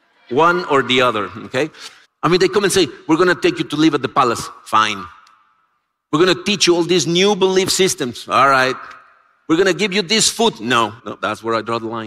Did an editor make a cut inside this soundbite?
yes; 2 cuts; at 2.0 s, 11.0 s

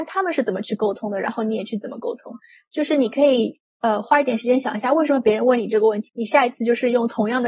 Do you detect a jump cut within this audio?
yes; 1 cut; at 6.1 s

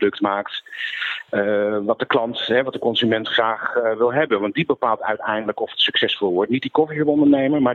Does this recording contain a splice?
no; 0 cuts

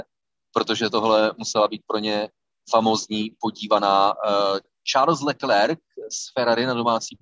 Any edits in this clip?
no; 0 cuts

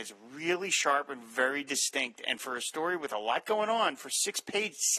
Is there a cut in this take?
no; 0 cuts

